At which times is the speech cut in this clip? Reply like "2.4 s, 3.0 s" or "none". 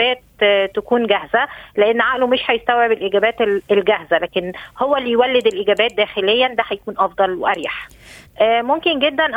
8.3 s